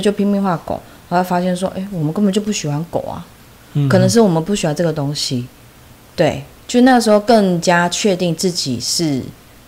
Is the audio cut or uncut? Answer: cut